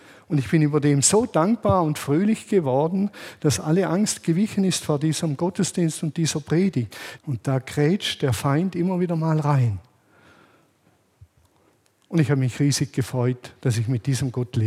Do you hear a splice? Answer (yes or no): yes